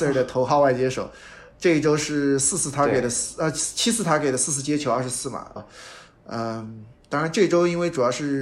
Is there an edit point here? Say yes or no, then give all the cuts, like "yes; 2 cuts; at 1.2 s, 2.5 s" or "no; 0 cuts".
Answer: yes; 1 cut; at 5.6 s